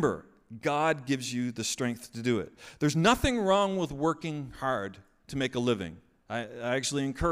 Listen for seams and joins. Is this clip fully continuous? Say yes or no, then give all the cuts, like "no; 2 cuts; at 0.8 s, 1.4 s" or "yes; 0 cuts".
yes; 0 cuts